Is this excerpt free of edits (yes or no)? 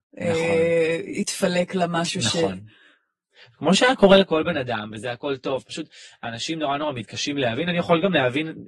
yes